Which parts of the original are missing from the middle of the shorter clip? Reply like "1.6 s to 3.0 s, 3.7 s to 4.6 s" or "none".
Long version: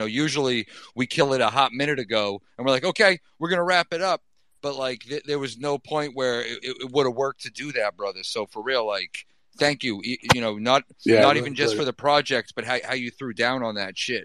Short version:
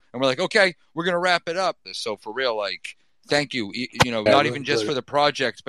4.3 s to 8.1 s, 10.6 s to 11.2 s

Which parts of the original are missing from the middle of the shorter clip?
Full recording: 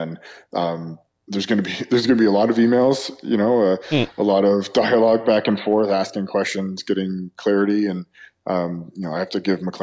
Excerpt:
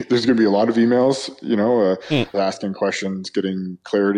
4.1 s to 5.9 s

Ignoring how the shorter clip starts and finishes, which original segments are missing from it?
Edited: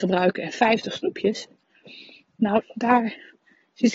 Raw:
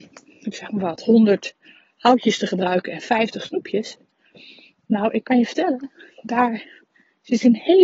5.1 s to 6.1 s

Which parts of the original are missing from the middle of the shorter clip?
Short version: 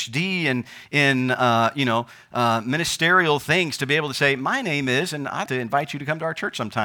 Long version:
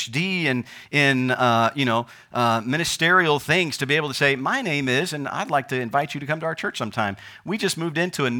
5.5 s to 5.7 s

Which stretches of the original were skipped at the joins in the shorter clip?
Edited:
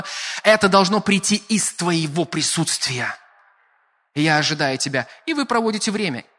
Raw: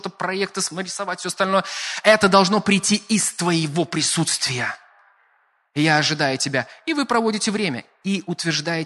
none

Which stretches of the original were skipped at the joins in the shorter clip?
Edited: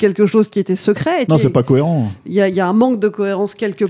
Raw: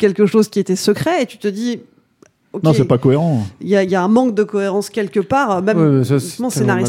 1.3 s to 2.6 s

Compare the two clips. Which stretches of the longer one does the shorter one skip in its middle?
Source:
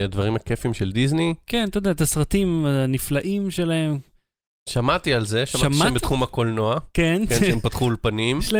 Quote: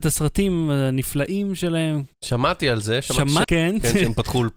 4.1 s to 4.6 s, 5.9 s to 6.9 s

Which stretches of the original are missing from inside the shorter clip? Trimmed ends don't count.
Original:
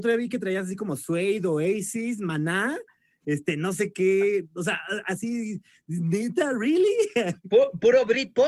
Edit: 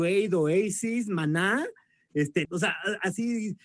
3.6 s to 4.5 s

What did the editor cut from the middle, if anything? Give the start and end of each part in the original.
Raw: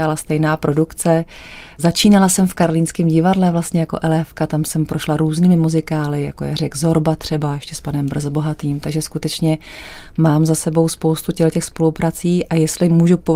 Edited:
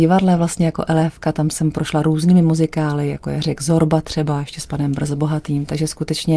none

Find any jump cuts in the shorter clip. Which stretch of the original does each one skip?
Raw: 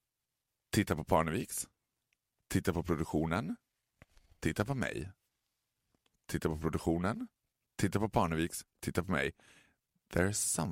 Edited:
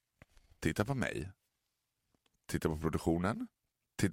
none

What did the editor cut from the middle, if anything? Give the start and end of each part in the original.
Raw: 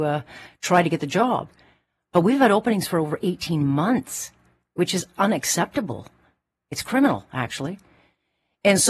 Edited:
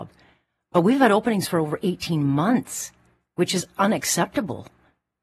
none

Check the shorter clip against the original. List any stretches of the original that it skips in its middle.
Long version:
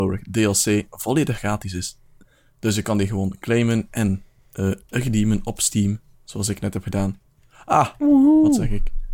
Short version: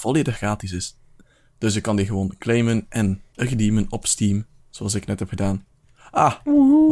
4.3 s to 4.9 s

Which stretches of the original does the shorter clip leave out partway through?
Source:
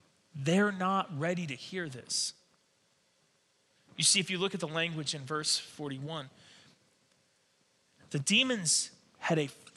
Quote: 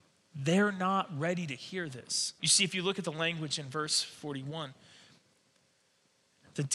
2.4 s to 3.9 s

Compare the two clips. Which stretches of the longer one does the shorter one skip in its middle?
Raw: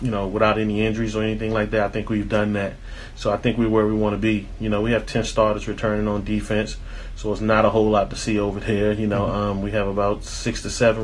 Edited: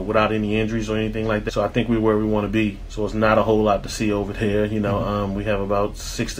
1.7 s to 3.2 s, 4.6 s to 7.2 s

